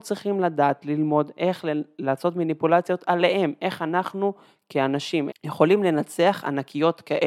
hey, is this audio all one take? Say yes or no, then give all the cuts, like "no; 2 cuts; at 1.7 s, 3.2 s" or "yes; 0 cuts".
no; 1 cut; at 5.3 s